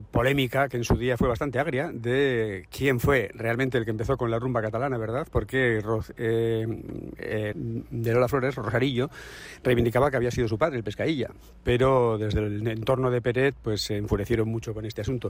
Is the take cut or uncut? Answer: cut